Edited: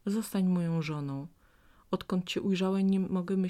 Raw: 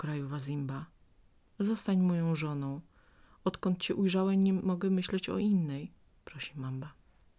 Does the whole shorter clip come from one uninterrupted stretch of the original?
yes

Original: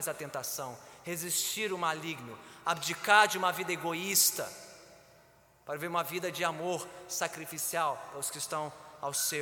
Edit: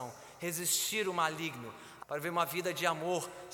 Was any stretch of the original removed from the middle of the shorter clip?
yes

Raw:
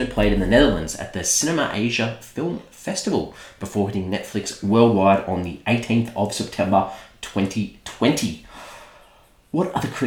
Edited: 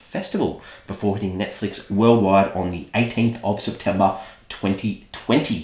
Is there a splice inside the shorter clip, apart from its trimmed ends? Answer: no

